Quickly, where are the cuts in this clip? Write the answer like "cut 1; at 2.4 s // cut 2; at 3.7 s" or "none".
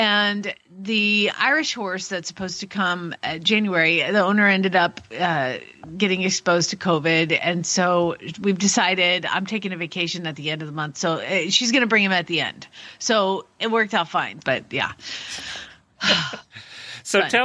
cut 1; at 14.4 s